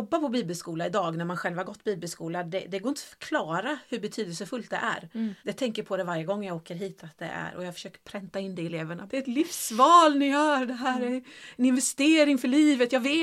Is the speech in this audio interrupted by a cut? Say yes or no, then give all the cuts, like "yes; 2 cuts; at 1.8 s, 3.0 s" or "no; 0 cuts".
yes; 2 cuts; at 5.4 s, 9.1 s